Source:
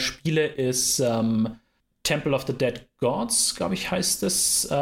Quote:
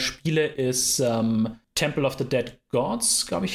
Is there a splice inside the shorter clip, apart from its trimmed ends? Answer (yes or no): yes